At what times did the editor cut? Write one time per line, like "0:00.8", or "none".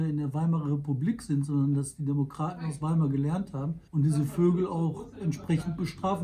0:03.9